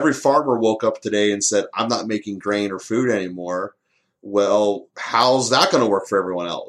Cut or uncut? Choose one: uncut